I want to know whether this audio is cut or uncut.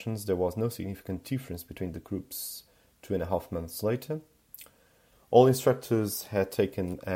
cut